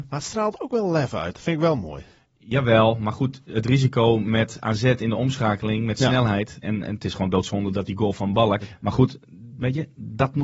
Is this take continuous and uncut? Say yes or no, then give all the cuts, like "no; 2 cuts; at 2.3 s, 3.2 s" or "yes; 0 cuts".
no; 2 cuts; at 6.6 s, 8.6 s